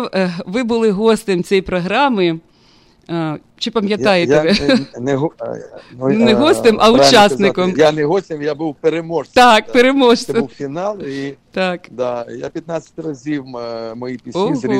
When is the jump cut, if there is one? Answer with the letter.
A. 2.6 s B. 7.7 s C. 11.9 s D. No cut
B